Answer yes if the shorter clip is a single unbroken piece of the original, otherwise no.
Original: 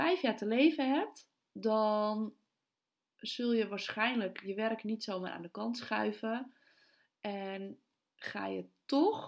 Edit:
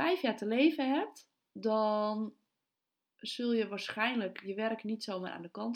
yes